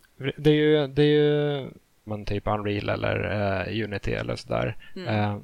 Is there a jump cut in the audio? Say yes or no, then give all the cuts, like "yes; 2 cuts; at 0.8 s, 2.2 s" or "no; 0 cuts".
yes; 1 cut; at 2.1 s